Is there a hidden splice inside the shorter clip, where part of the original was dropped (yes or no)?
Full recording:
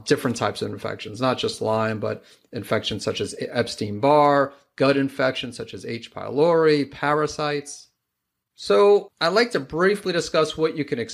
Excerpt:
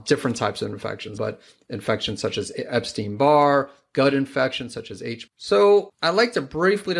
yes